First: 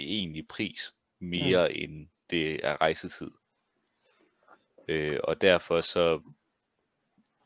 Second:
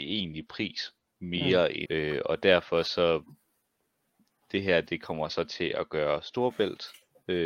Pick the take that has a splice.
second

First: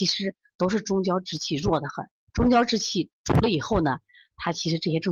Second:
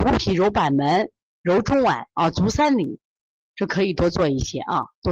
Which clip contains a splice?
second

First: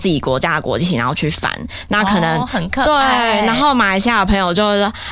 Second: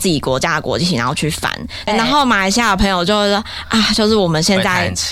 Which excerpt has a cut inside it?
second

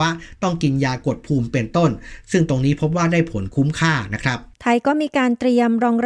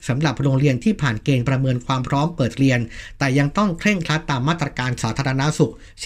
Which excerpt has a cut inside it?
first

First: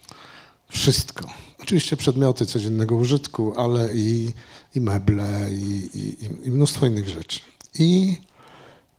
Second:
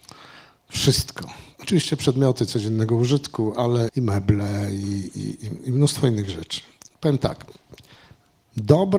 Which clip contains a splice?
second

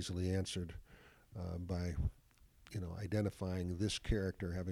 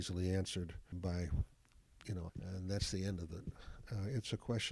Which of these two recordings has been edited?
second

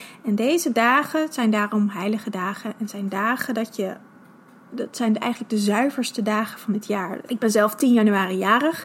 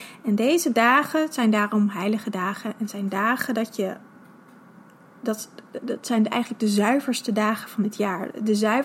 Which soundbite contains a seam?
first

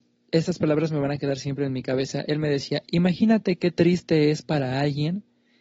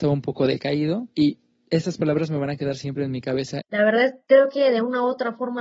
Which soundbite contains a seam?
second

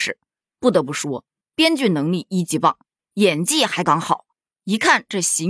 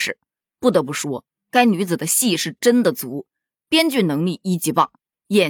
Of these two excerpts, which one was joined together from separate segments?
first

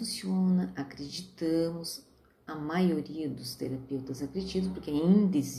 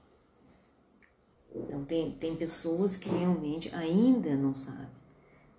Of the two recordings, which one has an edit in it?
second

